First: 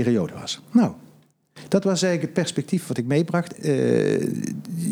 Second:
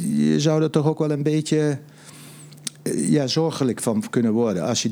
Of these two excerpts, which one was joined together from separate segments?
first; 1 cut; at 3.5 s

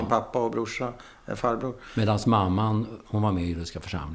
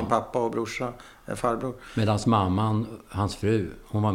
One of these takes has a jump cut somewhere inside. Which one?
first; 1 cut; at 3.0 s

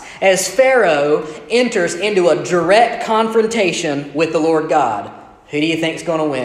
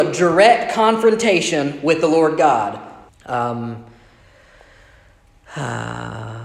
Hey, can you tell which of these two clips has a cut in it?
second; 1 cut; at 3.1 s

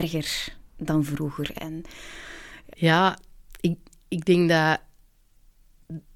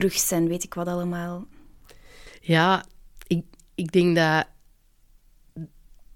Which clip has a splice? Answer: first; 2 cuts; at 1.6 s, 2.7 s

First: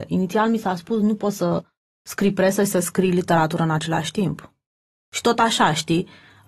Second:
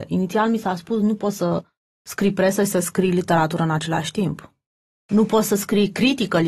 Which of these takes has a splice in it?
first; 1 cut; at 5.0 s

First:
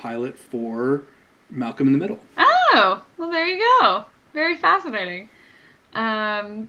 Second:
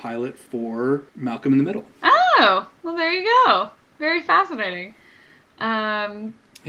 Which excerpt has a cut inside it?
second; 1 cut; at 1.1 s

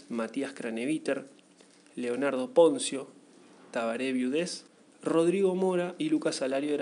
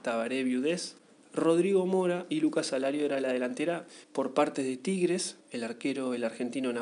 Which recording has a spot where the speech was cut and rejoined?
second; 2 cuts; at 4.0 s, 5.4 s

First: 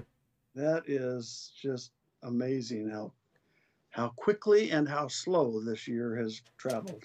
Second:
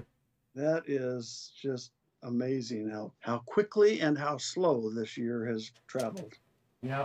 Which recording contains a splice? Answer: second; 1 cut; at 3.1 s

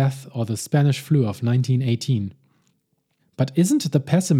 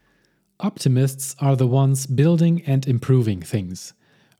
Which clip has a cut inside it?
first; 1 cut; at 3.2 s

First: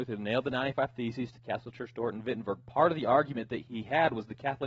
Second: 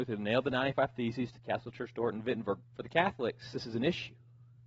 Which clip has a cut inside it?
second; 1 cut; at 2.6 s

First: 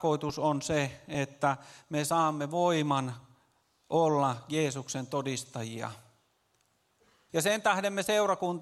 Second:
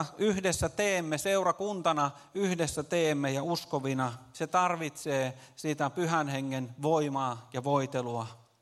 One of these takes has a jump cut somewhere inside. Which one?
first; 1 cut; at 7.3 s

